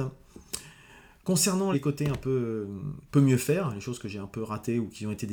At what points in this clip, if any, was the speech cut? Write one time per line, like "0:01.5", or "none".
0:01.7

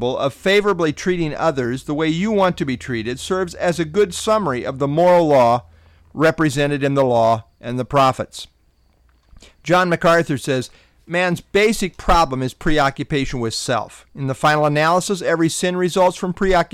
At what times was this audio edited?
none

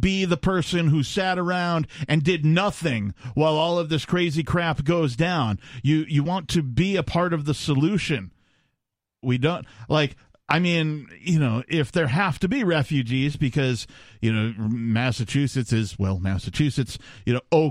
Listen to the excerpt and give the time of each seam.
0:09.2

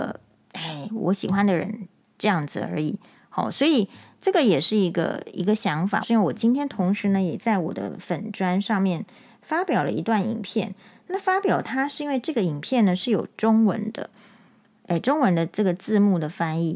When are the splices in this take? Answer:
0:06.0

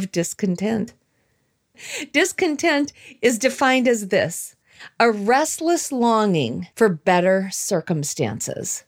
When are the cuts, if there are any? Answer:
0:01.7
0:06.7

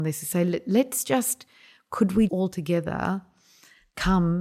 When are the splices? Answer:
0:02.3

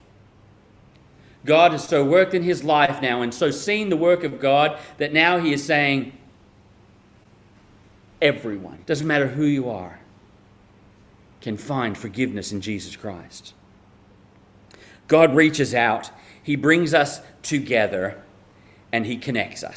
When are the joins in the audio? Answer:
0:08.8

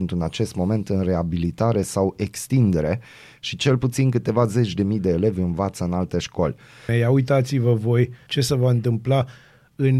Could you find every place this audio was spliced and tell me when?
0:06.9
0:08.3

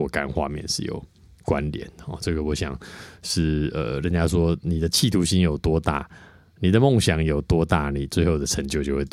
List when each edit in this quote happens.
none

